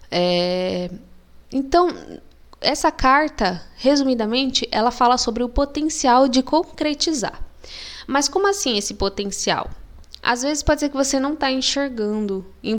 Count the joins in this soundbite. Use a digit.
0